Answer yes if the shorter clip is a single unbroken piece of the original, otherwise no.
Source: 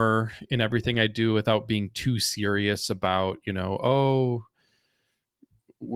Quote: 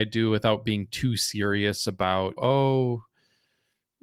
no